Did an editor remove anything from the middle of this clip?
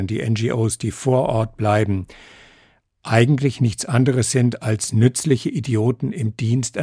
no; 0 cuts

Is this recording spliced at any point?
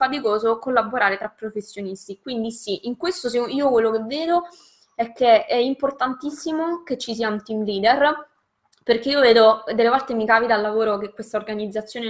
no; 0 cuts

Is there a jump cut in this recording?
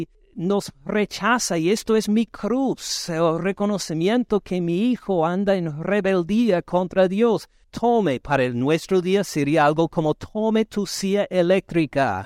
yes; 1 cut; at 7.6 s

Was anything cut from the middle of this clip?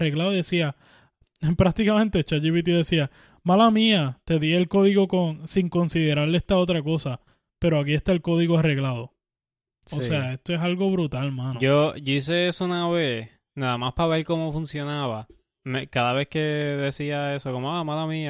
yes; 1 cut; at 15.6 s

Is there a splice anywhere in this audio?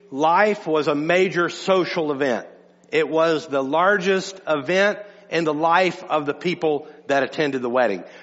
no; 0 cuts

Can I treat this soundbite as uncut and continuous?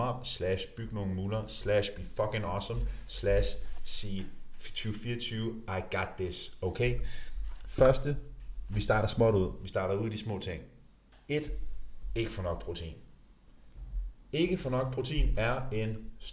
yes; 0 cuts

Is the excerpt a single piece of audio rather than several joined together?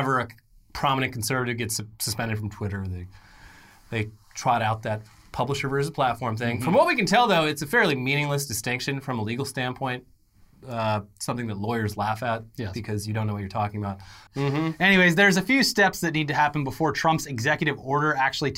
no; 1 cut; at 14.3 s

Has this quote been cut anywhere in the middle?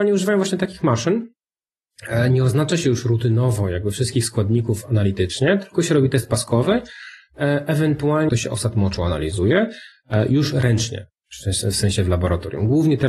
yes; 1 cut; at 8.3 s

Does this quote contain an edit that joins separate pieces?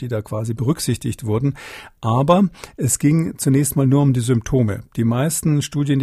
no; 0 cuts

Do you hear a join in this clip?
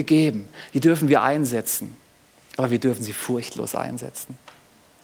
no; 0 cuts

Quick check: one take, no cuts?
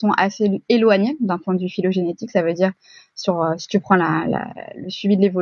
yes; 0 cuts

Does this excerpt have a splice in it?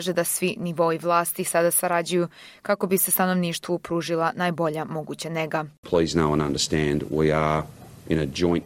no; 0 cuts

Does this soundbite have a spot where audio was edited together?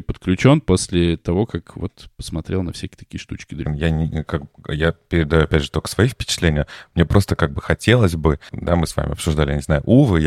yes; 2 cuts; at 3.7 s, 8.5 s

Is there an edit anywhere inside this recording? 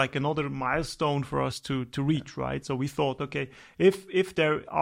no; 0 cuts

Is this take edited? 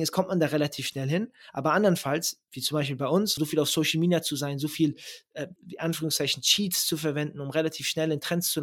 yes; 2 cuts; at 3.4 s, 5.6 s

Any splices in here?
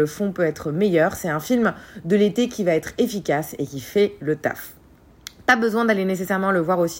no; 0 cuts

